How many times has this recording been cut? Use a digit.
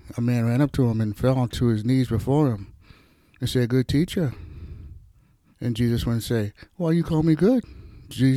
1